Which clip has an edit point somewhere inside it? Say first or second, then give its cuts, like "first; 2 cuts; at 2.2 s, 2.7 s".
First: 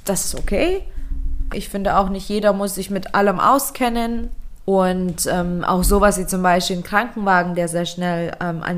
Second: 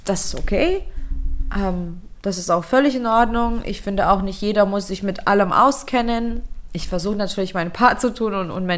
first; 2 cuts; at 1.5 s, 4.6 s